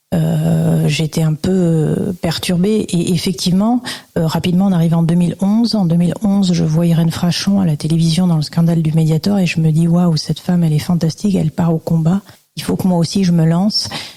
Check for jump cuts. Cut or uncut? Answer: uncut